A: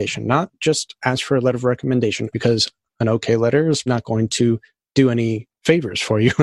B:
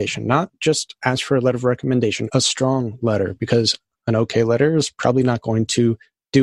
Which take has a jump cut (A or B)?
A